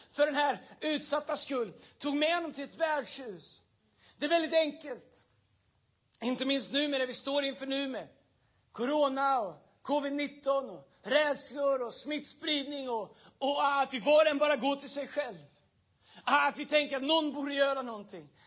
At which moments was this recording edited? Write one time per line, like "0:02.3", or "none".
none